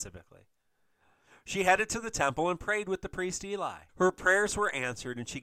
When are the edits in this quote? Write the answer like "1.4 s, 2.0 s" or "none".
3.9 s

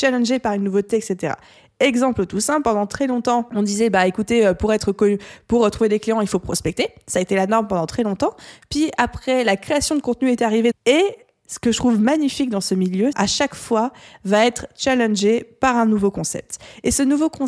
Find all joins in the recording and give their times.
10.7 s, 13.1 s

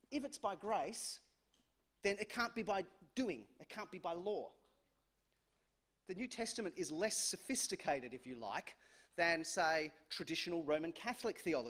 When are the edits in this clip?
none

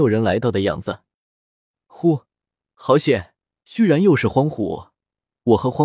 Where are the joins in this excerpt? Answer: 3.6 s

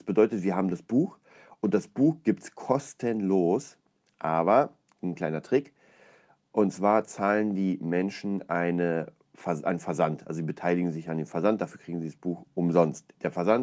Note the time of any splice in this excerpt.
none

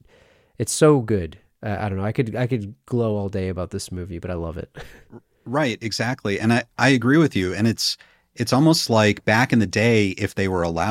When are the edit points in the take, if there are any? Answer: none

